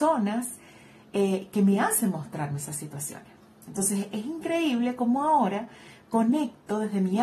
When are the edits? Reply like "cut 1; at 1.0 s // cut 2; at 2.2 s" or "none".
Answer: none